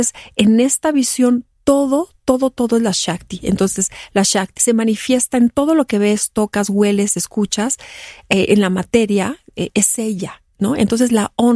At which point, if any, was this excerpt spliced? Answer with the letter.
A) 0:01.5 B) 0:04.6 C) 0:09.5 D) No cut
B